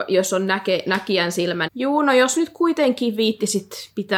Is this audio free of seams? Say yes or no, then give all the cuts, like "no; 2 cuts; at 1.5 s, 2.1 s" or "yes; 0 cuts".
no; 1 cut; at 1.7 s